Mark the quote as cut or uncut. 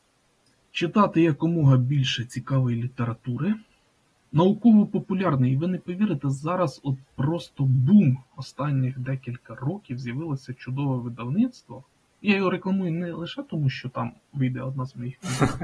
uncut